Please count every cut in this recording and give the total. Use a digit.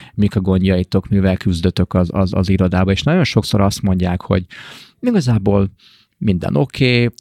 0